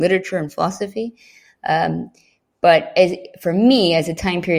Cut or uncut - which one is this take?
uncut